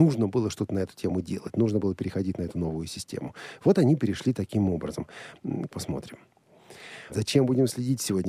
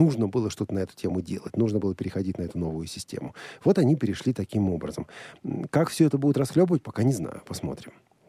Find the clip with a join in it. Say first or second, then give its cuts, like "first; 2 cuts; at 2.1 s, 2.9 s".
first; 2 cuts; at 5.7 s, 7.1 s